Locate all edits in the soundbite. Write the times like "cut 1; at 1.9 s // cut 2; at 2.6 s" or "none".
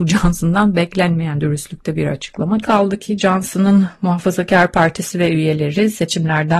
cut 1; at 2.6 s